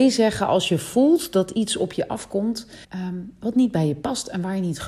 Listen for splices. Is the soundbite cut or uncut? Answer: cut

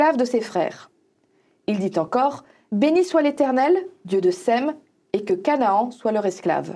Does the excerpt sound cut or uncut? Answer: uncut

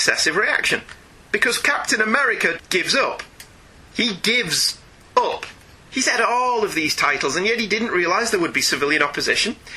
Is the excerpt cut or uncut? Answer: cut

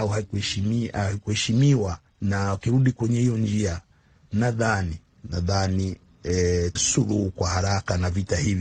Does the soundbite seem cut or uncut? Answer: cut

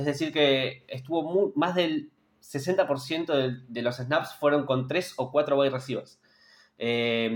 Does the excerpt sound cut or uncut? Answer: uncut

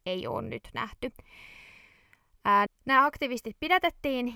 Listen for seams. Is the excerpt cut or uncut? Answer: cut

